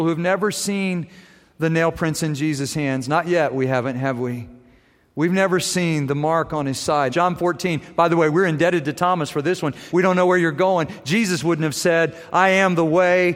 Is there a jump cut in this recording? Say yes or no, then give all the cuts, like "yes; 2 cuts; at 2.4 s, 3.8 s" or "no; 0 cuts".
yes; 2 cuts; at 7.1 s, 9.9 s